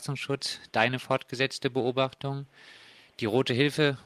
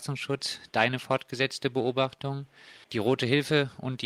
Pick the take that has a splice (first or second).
second